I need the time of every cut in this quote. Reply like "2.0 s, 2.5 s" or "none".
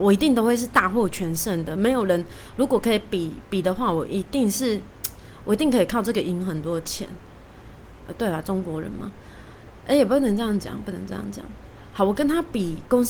none